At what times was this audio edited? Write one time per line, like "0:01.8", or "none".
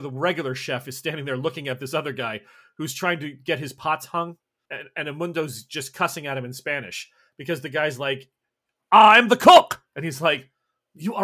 none